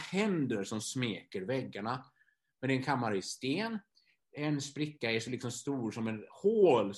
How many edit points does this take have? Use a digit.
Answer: 1